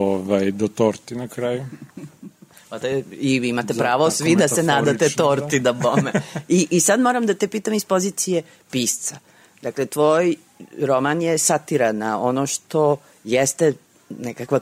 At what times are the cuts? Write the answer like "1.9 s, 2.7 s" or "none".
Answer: none